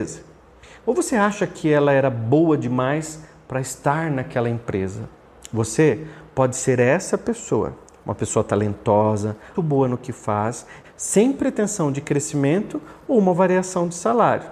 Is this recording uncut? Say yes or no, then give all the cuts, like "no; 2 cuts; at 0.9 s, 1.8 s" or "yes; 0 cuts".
no; 2 cuts; at 9.5 s, 10.8 s